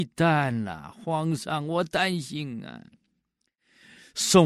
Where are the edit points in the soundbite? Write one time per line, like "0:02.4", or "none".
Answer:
none